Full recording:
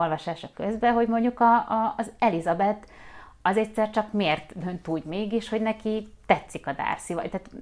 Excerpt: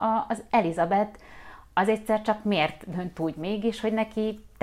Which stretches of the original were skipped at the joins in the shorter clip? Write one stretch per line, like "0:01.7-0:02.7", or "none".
none